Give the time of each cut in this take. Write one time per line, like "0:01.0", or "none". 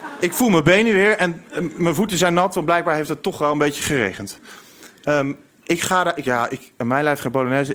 0:06.2